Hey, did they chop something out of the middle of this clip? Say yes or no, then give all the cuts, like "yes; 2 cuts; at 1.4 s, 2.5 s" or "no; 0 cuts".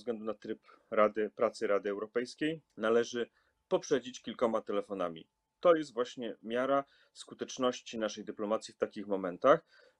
yes; 1 cut; at 2.7 s